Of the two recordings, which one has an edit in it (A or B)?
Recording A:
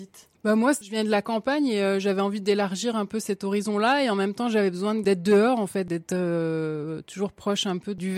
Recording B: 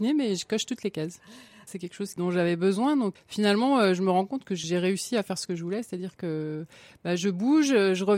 B